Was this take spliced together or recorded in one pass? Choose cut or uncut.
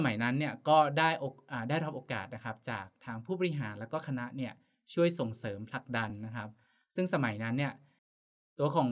uncut